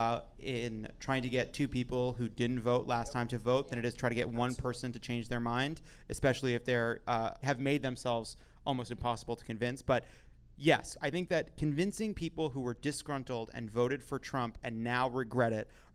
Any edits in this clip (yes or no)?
no